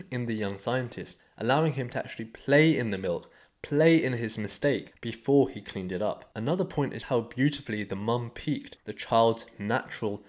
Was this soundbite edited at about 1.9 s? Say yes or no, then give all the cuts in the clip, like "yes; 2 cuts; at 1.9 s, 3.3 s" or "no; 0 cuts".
no; 1 cut; at 7.0 s